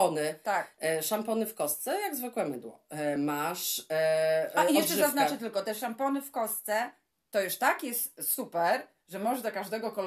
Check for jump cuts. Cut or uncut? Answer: uncut